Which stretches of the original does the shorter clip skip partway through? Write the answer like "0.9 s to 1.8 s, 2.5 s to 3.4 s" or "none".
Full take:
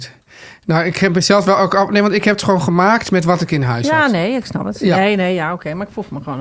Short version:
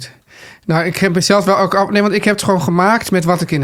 none